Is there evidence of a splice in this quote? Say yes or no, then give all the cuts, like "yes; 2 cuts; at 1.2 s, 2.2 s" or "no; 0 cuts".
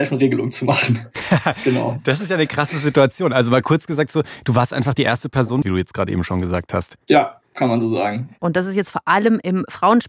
yes; 3 cuts; at 5.6 s, 7.0 s, 8.4 s